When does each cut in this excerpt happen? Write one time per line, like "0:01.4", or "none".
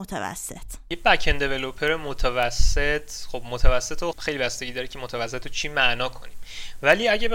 0:04.1